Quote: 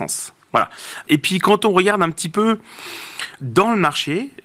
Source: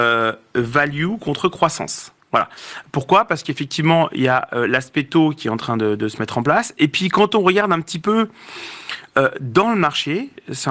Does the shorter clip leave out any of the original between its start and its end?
yes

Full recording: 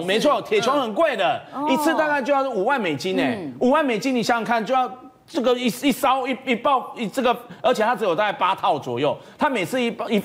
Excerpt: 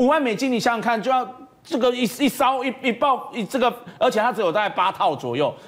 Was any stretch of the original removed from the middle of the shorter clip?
no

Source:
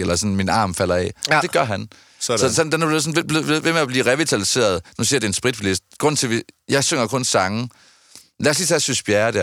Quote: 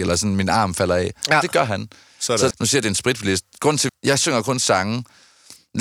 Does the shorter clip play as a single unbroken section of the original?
no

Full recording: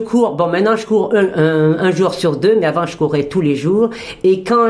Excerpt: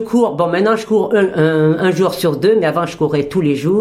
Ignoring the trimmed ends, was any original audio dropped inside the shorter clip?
no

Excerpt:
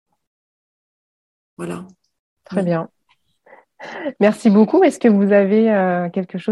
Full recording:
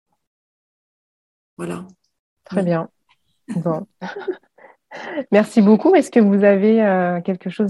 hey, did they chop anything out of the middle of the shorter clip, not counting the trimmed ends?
yes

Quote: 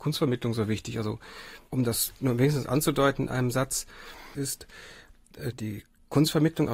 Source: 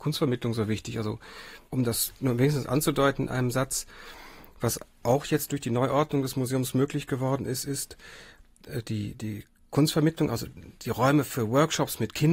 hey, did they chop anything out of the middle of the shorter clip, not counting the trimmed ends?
yes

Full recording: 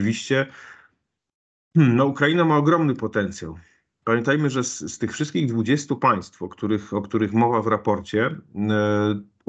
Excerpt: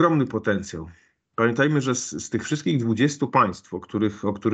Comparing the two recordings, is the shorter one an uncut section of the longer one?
yes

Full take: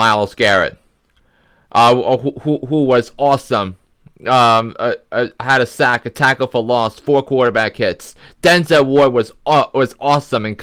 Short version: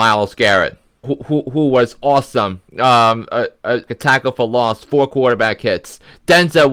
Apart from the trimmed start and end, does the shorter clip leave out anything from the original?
yes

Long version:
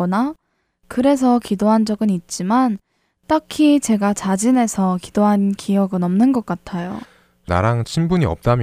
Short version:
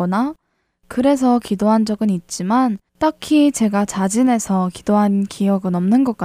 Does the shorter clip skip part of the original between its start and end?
yes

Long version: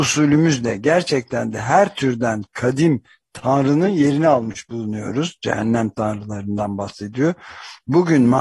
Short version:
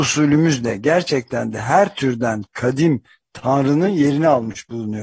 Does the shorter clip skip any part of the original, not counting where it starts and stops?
no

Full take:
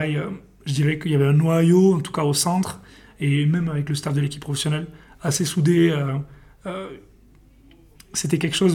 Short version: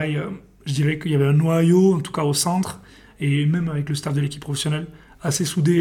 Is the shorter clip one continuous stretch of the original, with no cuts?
yes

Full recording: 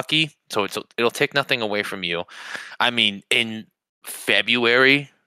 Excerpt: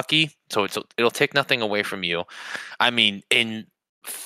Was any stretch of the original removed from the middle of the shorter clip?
no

